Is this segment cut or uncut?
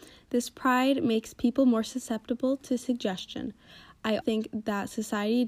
cut